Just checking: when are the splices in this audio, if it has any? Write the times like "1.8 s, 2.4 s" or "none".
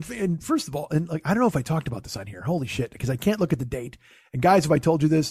none

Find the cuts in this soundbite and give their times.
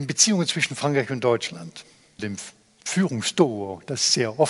2.2 s

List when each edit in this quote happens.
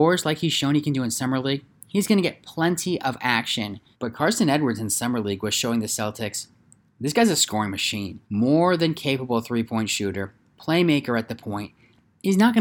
3.9 s, 8.2 s

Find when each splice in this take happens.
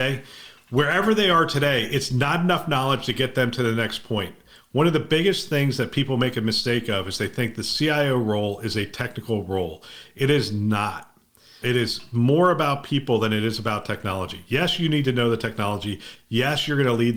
11.6 s

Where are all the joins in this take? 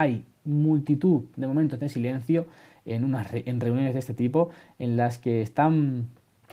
none

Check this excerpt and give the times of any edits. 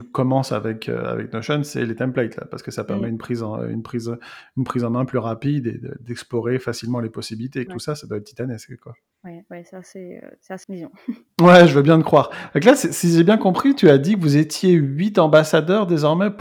7.7 s, 10.6 s

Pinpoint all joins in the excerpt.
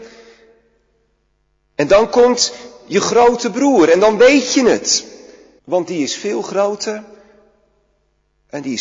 5.6 s

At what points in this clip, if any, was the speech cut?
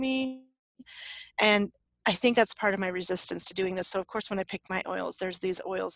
none

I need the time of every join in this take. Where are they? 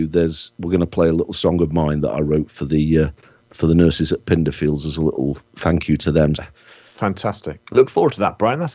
6.4 s

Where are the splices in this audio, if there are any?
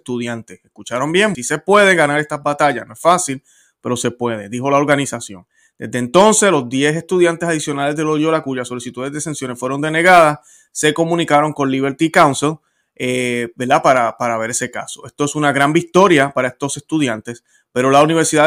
1.3 s

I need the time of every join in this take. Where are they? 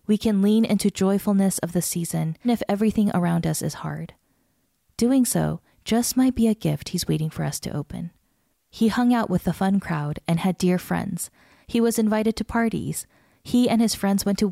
2.4 s, 8.5 s

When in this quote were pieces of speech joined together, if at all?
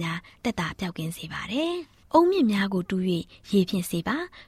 none

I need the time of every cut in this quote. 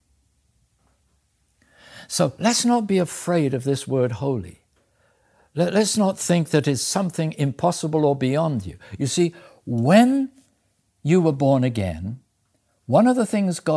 none

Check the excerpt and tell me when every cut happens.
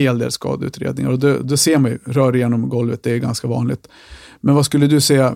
none

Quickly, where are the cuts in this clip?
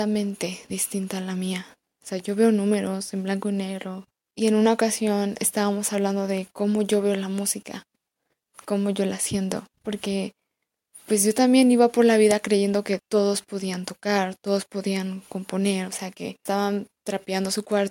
none

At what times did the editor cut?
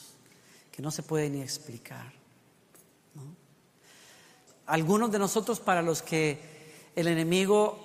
4.5 s

